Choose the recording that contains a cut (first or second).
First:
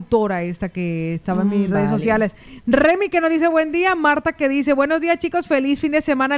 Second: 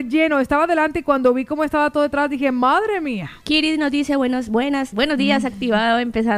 second